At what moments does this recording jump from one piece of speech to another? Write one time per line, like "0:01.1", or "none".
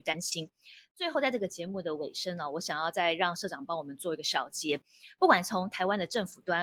none